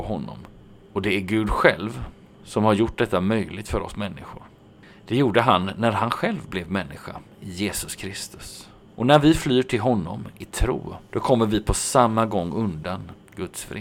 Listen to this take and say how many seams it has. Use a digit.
0